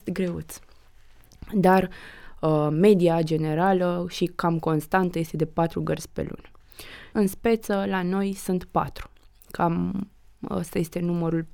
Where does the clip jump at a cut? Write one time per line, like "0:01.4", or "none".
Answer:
0:01.5
0:07.1